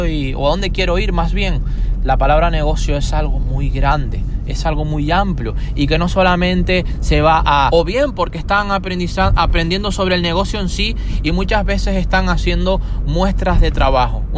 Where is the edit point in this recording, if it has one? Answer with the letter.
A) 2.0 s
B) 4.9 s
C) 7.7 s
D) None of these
C